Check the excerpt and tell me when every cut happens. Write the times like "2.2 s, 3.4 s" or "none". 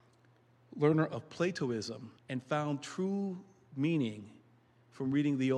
2.2 s